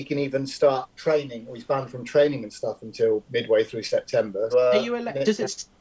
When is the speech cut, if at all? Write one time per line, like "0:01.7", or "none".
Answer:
0:00.9
0:04.5